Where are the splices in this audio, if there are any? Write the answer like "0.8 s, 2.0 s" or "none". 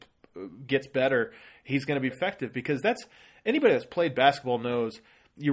2.1 s